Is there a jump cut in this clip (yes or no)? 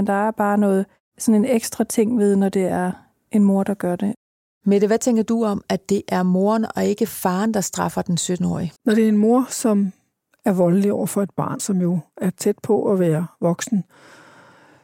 yes